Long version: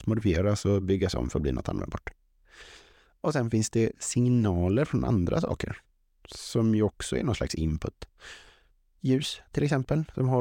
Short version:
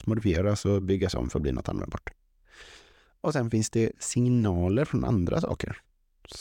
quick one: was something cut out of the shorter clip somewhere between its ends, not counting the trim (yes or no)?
no